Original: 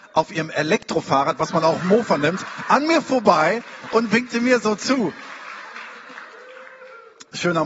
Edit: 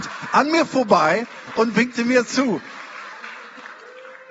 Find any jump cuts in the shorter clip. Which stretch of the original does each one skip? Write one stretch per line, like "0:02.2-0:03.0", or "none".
0:04.6-0:04.8